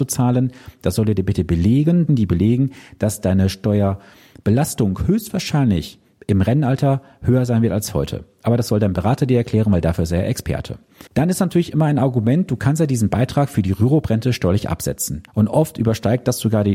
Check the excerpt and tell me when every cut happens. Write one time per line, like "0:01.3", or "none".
0:02.1
0:11.1
0:15.3